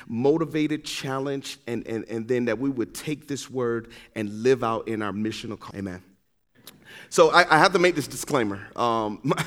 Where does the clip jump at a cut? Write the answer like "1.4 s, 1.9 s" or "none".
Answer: 5.7 s